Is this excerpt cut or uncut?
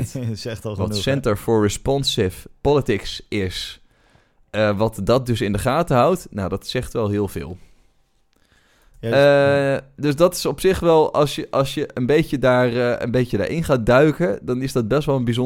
uncut